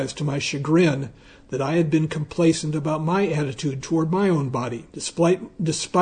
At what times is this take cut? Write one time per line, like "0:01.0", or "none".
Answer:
0:04.9